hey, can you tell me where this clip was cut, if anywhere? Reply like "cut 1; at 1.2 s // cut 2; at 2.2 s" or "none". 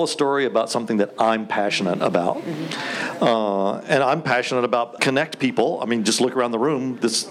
cut 1; at 5.0 s